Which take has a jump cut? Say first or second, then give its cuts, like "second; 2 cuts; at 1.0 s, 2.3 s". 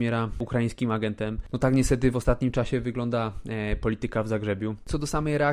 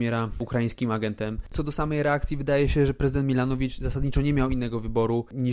second; 1 cut; at 1.5 s